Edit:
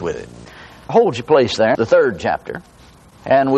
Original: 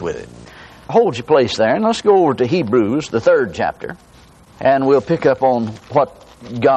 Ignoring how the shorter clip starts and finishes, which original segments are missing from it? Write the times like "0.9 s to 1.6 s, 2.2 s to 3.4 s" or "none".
1.7 s to 3.1 s